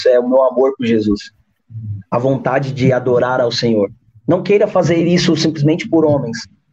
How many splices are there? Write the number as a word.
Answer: one